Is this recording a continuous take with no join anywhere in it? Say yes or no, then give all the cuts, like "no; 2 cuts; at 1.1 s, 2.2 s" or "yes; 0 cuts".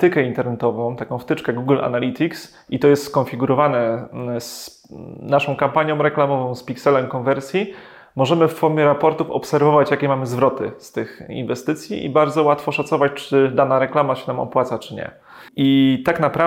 no; 1 cut; at 15.5 s